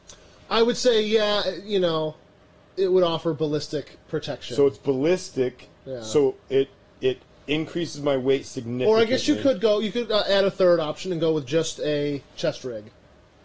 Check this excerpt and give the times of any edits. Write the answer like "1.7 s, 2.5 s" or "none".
none